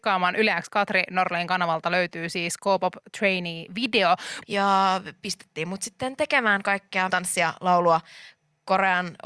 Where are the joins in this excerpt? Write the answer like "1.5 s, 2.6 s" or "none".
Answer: 4.4 s, 7.1 s

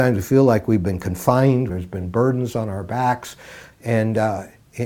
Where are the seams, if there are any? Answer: 1.7 s, 3.7 s

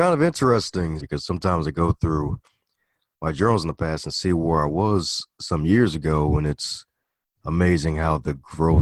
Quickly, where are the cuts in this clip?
1.0 s

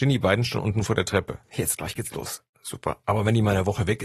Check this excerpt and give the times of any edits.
3.0 s

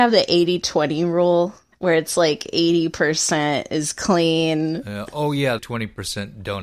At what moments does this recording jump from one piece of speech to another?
5.6 s

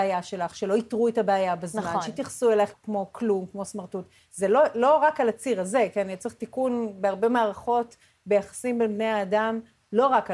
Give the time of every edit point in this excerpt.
2.7 s

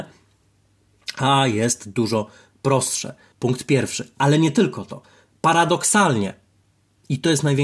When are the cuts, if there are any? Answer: 3.3 s

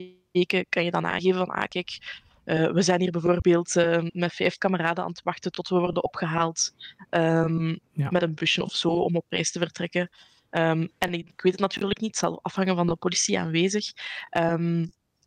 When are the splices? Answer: 11.3 s

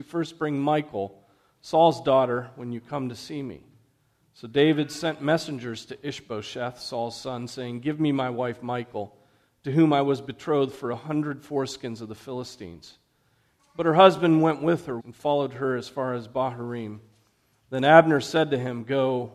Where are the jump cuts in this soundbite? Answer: 13.6 s, 15.0 s

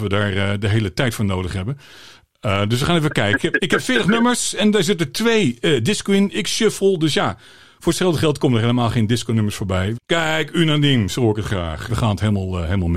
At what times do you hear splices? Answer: 9.9 s, 11.9 s

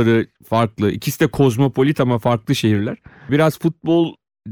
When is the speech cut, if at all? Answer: 3.3 s

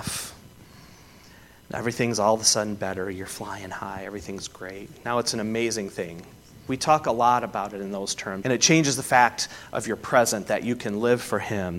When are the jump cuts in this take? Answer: 6.7 s, 8.4 s

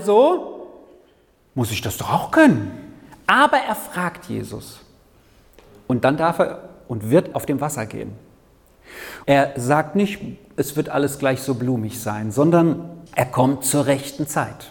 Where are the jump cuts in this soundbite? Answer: 7.3 s, 9.2 s, 13.1 s

